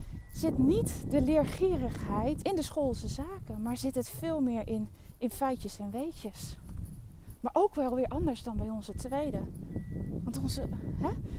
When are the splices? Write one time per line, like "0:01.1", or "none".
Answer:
0:02.4